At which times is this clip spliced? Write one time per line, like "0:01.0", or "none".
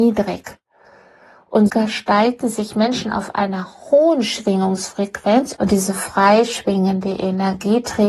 0:01.7
0:05.6